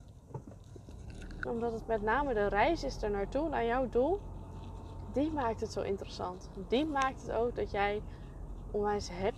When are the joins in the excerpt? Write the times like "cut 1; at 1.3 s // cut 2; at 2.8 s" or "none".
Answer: cut 1; at 1.5 s

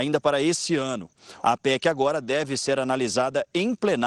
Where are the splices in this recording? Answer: cut 1; at 1.4 s

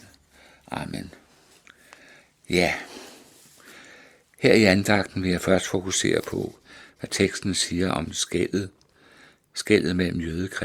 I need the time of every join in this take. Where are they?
none

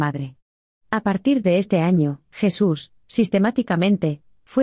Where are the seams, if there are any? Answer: none

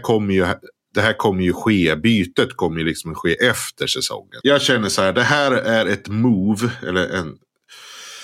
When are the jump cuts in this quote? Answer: cut 1; at 4.4 s

